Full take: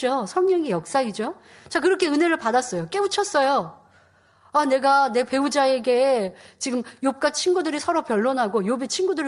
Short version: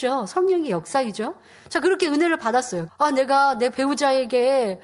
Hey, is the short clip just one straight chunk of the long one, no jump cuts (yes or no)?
no